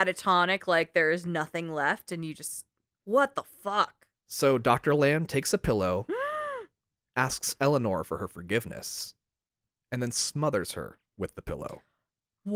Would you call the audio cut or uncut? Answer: uncut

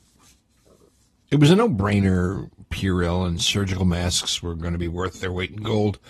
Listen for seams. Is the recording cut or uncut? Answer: uncut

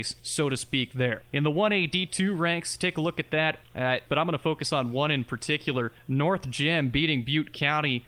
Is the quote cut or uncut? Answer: cut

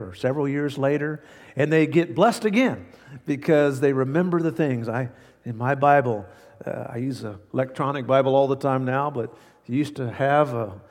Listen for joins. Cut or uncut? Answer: uncut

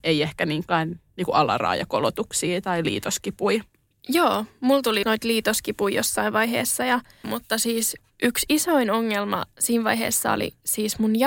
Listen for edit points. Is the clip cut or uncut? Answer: cut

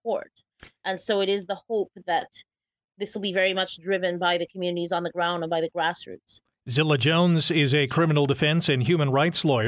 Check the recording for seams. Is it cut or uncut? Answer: uncut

